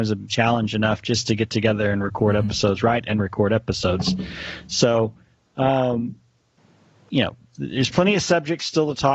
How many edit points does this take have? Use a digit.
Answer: 0